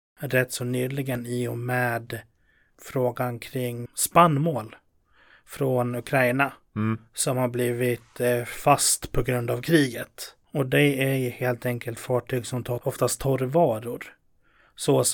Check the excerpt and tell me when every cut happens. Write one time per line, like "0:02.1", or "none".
0:03.9